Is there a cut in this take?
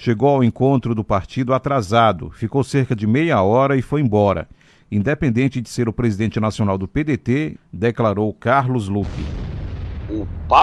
yes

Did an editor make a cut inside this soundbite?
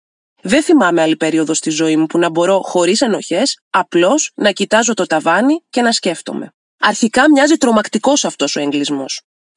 yes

